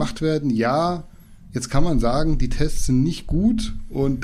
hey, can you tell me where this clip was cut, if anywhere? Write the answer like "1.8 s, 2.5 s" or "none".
none